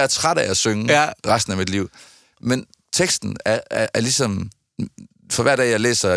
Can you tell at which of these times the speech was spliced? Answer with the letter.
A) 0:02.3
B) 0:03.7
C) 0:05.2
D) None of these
A